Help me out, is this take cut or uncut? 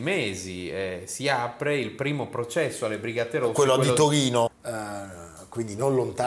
cut